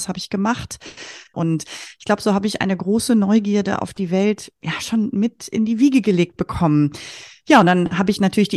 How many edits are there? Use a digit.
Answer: 1